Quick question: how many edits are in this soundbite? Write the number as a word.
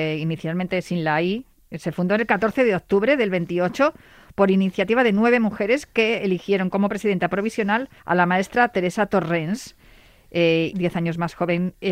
two